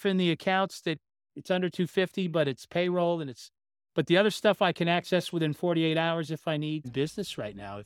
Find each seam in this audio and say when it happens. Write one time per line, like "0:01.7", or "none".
0:06.8